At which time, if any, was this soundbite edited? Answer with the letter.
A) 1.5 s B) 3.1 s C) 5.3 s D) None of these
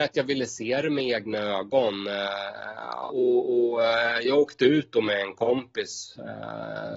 B